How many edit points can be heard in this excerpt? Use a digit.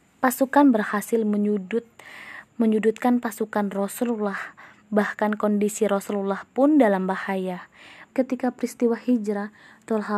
1